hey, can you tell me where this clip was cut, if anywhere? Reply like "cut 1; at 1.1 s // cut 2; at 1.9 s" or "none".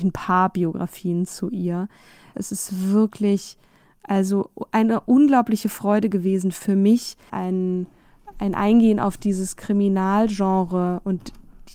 cut 1; at 2.3 s // cut 2; at 7.3 s